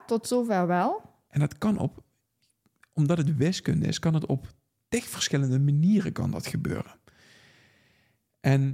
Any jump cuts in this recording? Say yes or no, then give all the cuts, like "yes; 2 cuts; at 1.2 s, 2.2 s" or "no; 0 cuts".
yes; 1 cut; at 1.3 s